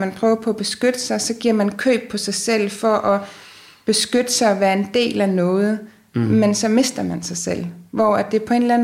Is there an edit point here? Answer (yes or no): no